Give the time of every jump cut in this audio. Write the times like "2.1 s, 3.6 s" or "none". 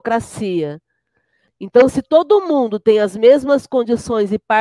1.5 s

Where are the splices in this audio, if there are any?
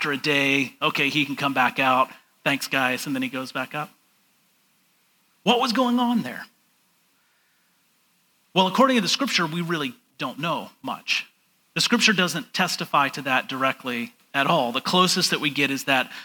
none

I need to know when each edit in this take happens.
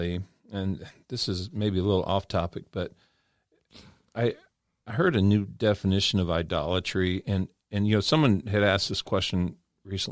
none

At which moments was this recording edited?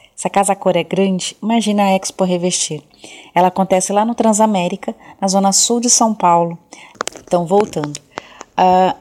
none

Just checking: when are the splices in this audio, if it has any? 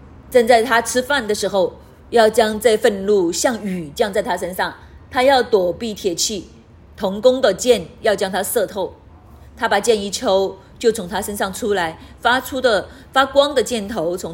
none

